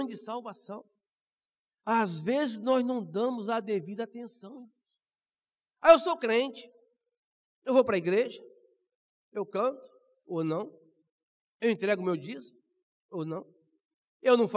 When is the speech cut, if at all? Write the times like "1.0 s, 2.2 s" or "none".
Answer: 1.8 s